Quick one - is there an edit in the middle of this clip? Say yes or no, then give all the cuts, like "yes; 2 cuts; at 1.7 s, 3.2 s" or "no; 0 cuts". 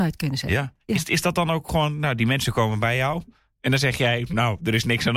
no; 0 cuts